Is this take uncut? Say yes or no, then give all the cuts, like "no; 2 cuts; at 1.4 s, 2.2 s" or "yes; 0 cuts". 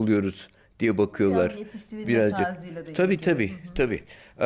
yes; 0 cuts